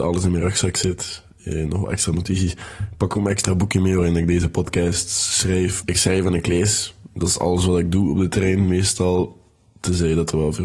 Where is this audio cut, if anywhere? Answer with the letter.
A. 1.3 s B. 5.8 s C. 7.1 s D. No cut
B